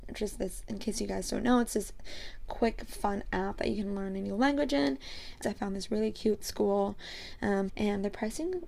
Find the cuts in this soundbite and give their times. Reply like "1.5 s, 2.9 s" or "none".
5.4 s, 7.7 s